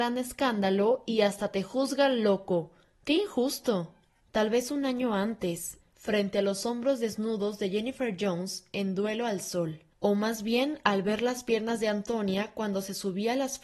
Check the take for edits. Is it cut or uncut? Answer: cut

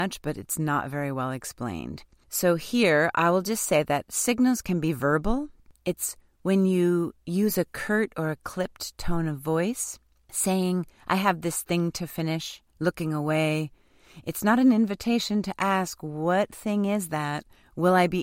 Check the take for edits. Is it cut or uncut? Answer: uncut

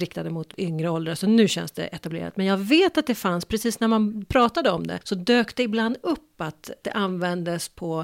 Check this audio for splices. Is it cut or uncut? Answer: uncut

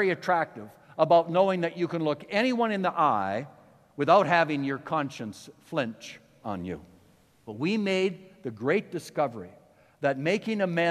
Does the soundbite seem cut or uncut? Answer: cut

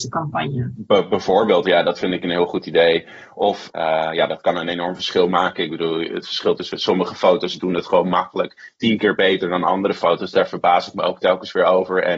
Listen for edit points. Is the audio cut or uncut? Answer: uncut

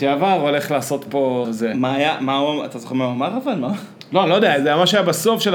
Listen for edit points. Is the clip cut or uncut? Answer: cut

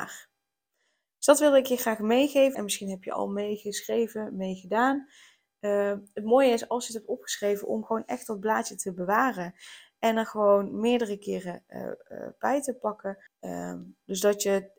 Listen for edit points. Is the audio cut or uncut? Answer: cut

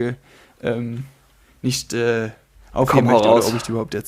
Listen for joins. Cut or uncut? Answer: uncut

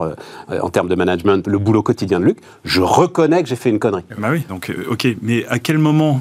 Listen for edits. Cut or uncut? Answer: cut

